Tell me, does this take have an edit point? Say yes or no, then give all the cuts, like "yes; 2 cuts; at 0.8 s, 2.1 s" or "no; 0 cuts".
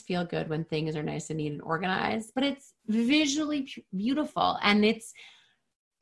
no; 0 cuts